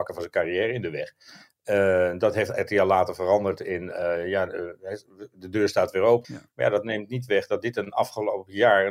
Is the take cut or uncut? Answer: cut